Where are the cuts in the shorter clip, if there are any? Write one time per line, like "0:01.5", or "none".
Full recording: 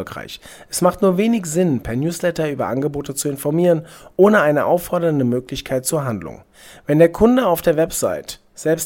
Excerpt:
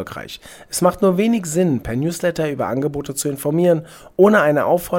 none